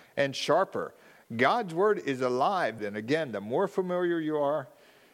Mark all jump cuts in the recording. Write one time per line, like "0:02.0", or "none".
0:02.8